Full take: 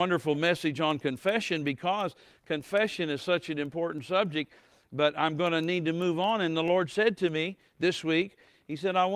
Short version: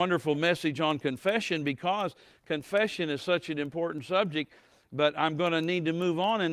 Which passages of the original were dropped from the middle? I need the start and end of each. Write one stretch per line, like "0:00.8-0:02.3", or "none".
none

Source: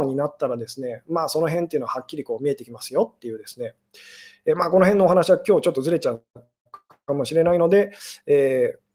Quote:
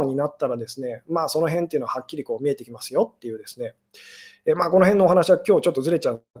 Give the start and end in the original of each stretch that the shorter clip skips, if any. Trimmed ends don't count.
none

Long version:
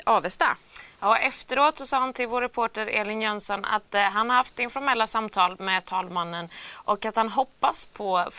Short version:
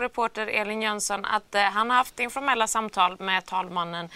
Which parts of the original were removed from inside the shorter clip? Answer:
none

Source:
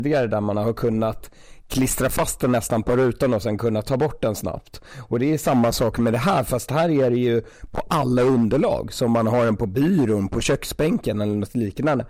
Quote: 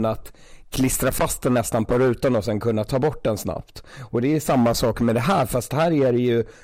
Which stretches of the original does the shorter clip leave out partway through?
none

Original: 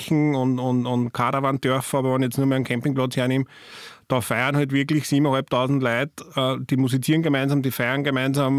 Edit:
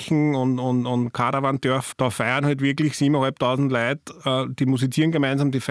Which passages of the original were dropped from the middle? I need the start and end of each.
0:01.9-0:04.0

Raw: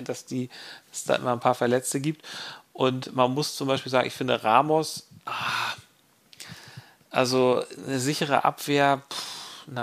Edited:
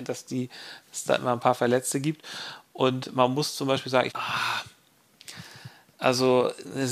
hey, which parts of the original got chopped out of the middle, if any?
0:04.1-0:05.2

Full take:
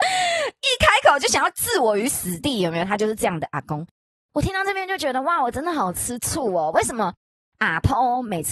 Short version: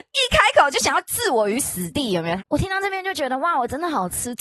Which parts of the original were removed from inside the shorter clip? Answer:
0:02.9-0:04.2

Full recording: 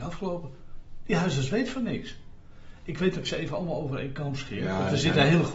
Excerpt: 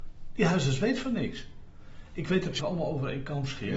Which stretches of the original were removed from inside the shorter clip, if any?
0:03.3-0:03.5

